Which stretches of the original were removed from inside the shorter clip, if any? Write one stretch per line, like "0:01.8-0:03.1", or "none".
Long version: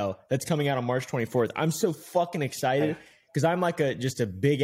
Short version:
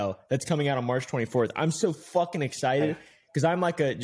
none